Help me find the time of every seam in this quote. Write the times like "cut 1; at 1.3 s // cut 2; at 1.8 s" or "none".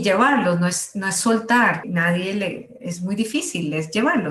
cut 1; at 1.8 s